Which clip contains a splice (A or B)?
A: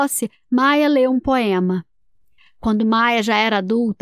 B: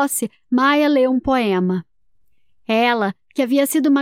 A